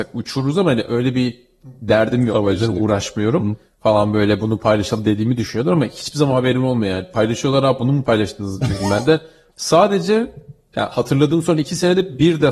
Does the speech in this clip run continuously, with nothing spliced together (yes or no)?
no